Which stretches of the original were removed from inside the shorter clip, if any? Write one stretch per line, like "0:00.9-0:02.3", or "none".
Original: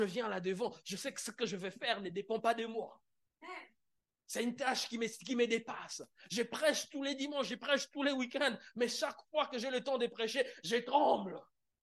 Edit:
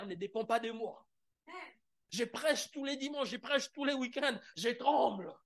0:04.0-0:06.3
0:08.7-0:10.6